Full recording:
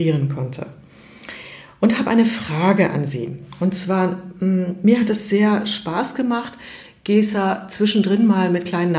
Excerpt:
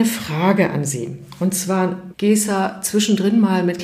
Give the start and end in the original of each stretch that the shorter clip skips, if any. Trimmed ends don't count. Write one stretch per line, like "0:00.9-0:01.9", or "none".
0:04.3-0:07.0